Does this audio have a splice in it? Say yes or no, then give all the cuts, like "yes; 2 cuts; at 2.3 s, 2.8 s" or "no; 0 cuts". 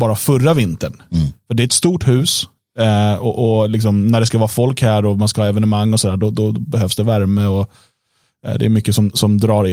no; 0 cuts